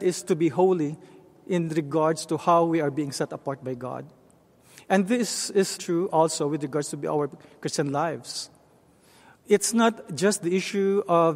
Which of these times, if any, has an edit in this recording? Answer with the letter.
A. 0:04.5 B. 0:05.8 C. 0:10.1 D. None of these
B